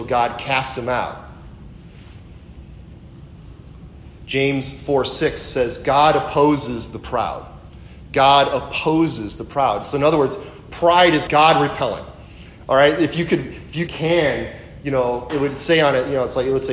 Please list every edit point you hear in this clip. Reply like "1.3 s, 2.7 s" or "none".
11.3 s, 13.9 s, 15.3 s